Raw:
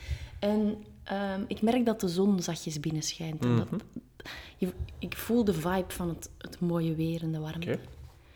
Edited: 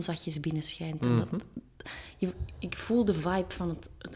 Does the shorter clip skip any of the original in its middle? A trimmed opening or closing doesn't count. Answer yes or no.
no